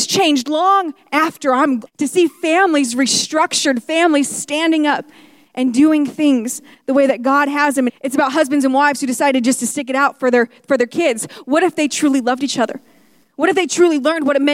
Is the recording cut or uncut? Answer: cut